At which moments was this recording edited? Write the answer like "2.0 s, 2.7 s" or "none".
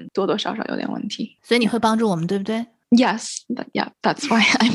none